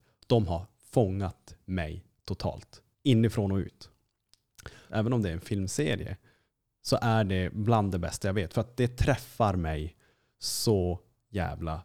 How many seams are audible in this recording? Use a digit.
2